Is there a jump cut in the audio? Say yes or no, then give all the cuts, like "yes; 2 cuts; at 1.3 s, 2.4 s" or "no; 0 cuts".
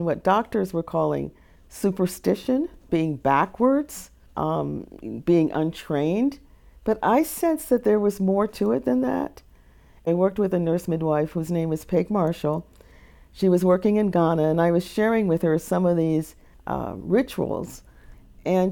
no; 0 cuts